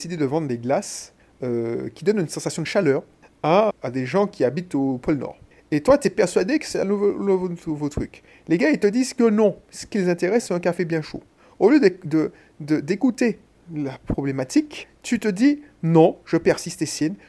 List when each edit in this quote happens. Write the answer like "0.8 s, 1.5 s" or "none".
3.7 s